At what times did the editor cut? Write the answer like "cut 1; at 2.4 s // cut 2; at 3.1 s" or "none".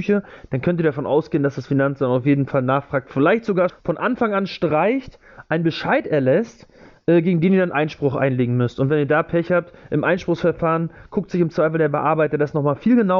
cut 1; at 3.7 s